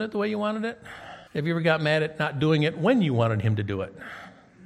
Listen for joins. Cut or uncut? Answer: cut